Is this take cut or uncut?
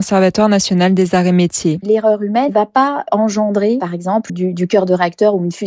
cut